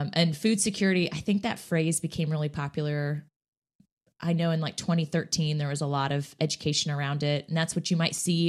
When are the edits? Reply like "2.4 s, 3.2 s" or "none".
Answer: none

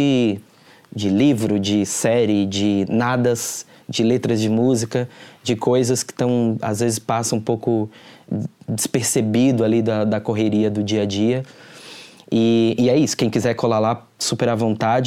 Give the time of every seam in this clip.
none

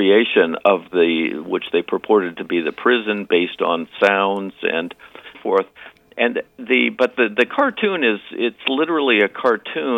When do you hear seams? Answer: 5.3 s

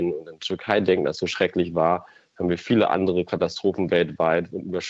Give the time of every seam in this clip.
none

